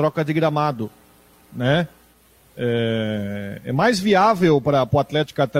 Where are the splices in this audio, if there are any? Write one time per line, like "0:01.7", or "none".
none